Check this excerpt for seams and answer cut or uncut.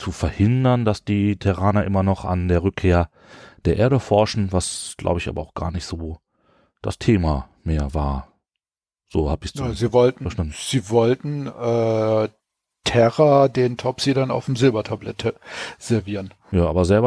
uncut